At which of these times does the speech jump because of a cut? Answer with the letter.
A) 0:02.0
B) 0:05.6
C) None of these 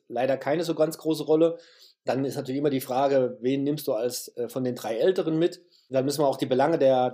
C